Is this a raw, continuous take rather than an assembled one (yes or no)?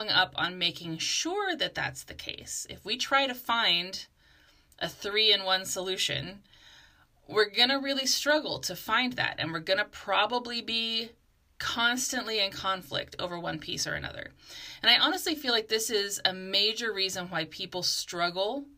yes